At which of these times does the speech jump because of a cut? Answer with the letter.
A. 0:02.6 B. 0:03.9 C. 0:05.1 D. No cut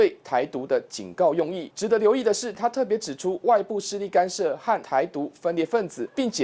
D